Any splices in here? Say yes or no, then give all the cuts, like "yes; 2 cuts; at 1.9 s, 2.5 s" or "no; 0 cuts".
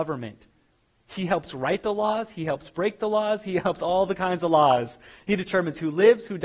no; 0 cuts